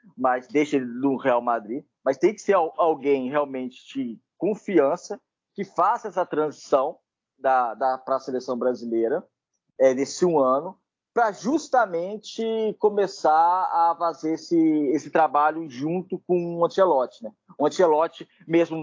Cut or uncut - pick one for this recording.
uncut